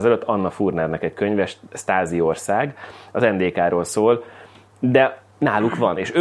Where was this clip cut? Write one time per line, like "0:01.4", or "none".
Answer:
0:04.7